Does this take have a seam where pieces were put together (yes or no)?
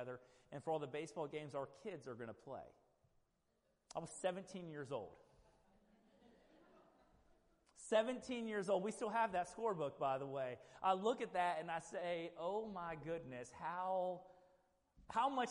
no